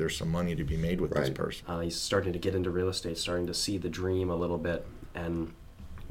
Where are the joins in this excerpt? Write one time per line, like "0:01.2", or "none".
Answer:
0:01.6